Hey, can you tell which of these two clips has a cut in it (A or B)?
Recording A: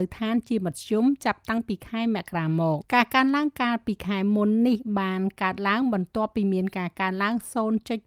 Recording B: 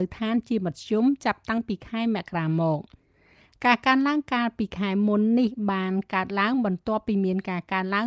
A